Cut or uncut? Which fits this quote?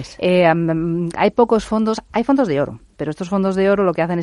uncut